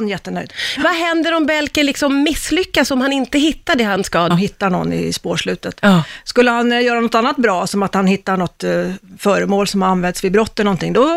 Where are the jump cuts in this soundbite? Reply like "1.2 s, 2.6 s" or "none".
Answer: 4.3 s